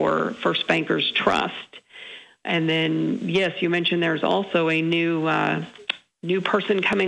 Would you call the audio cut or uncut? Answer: uncut